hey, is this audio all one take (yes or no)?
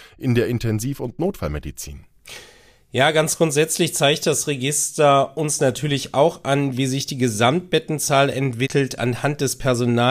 yes